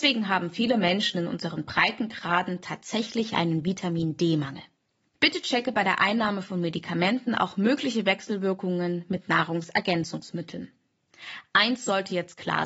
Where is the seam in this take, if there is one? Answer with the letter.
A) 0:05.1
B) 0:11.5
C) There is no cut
A